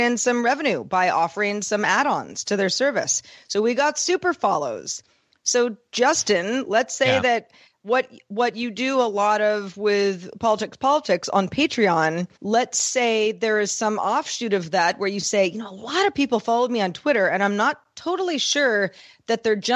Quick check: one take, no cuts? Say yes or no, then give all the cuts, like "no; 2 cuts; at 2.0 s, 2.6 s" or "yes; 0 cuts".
no; 2 cuts; at 10.8 s, 12.4 s